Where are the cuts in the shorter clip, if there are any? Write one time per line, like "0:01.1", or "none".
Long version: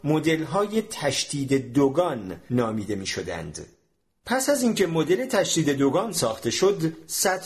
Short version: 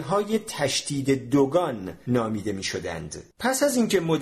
0:03.3

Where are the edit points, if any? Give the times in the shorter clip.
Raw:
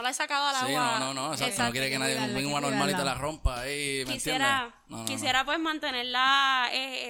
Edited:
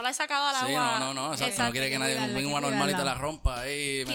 none

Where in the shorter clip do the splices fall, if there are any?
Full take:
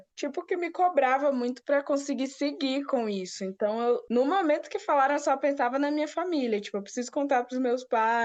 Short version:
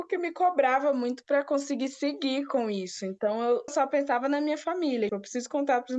0:03.7
0:05.1

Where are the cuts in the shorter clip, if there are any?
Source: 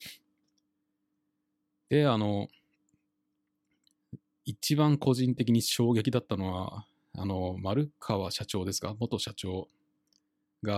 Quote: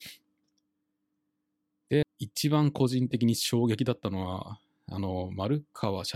0:02.0

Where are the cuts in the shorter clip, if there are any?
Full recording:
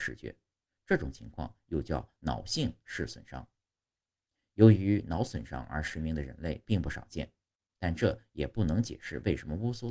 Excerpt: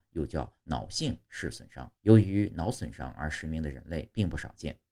0:02.0

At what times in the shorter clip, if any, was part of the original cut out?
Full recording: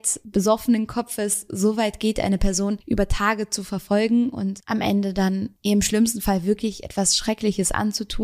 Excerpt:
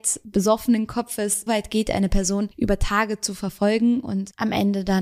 0:01.5

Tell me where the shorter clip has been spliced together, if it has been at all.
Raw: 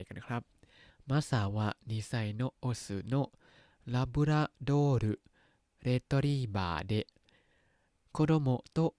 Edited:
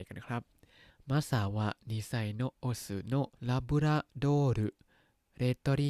0:03.3

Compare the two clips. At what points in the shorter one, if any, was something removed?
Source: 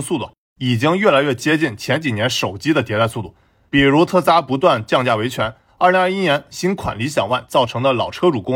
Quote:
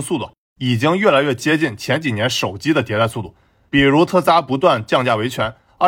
none

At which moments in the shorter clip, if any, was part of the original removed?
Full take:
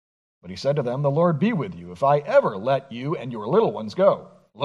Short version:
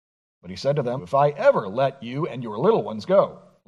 0:01.0

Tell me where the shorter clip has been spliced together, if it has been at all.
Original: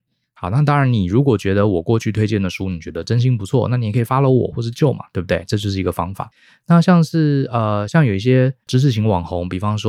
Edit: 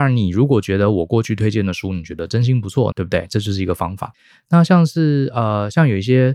0:02.9

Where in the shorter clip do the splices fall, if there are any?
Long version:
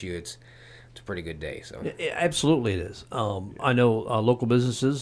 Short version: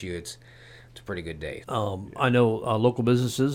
0:01.6

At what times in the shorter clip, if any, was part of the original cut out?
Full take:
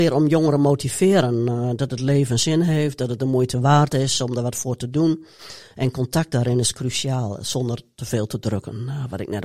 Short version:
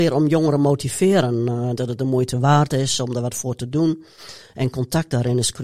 0:01.8

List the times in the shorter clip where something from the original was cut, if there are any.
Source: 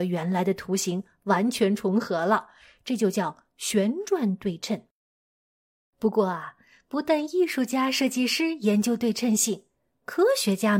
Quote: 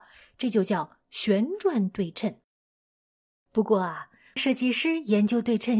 0:04.4

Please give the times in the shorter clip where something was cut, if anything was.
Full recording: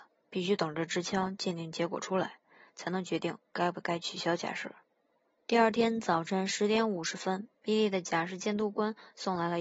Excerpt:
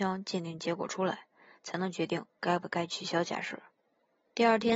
none

